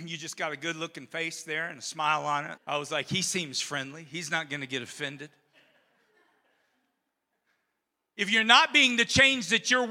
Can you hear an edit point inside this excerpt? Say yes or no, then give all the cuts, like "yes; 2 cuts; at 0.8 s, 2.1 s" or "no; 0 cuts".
yes; 1 cut; at 2.6 s